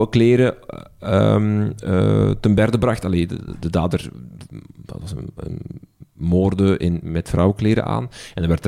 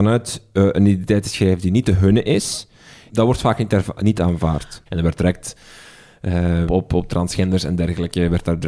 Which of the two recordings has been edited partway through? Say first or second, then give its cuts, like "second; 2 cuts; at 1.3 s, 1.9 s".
second; 3 cuts; at 3.1 s, 4.9 s, 6.7 s